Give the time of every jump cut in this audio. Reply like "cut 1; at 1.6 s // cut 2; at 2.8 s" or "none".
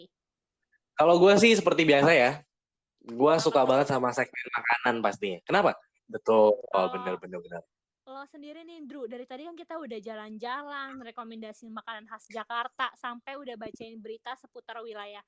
cut 1; at 6.0 s